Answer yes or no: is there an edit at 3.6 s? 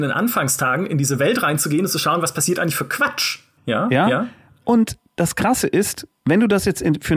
yes